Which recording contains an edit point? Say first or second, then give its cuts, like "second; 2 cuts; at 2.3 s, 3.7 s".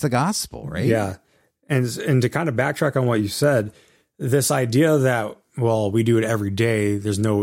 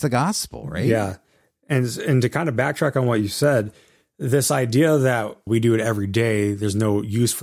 second; 1 cut; at 5.5 s